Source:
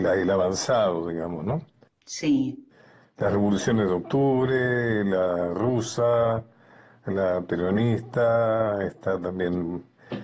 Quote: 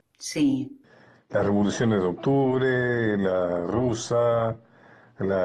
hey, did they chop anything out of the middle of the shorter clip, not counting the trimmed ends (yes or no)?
no